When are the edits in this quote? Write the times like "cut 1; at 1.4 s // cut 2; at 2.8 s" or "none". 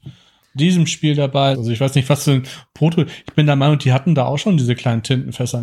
cut 1; at 1.5 s